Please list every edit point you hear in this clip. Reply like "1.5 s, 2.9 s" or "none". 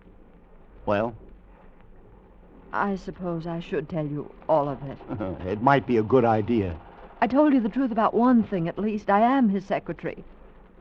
none